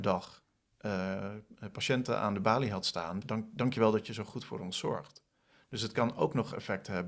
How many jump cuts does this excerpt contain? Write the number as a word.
one